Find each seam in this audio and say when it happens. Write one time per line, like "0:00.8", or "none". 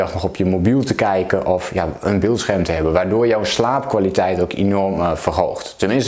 none